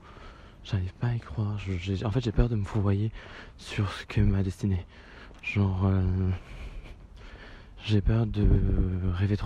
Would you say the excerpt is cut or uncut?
uncut